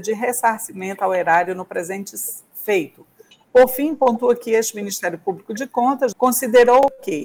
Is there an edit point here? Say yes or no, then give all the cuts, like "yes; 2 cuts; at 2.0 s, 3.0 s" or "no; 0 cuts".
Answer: yes; 2 cuts; at 3.3 s, 6.1 s